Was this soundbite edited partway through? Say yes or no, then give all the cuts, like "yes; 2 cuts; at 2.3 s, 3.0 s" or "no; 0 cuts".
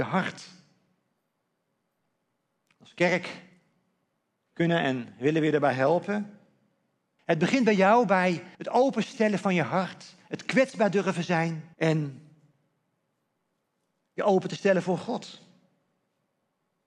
yes; 3 cuts; at 7.2 s, 8.5 s, 11.7 s